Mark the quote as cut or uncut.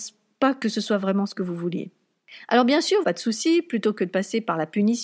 cut